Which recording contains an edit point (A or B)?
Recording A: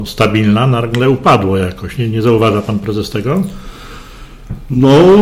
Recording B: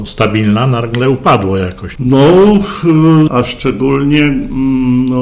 B